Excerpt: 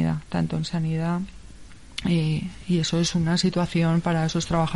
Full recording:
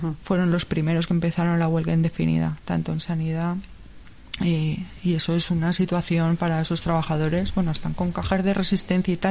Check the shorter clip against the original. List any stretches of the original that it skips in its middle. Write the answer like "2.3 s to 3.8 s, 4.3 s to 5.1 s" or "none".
none